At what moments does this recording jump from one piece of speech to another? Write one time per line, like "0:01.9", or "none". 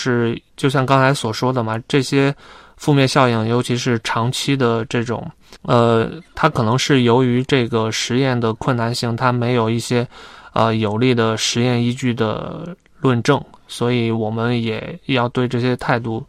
none